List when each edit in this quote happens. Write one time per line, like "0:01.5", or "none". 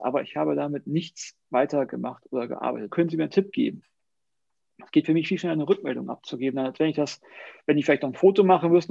0:02.9